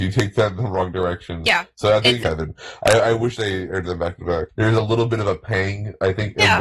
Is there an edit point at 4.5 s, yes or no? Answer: yes